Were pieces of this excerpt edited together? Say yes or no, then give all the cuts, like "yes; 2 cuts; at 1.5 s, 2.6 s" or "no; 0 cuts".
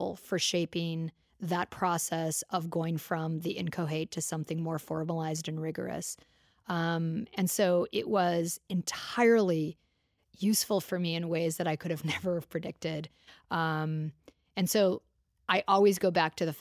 no; 0 cuts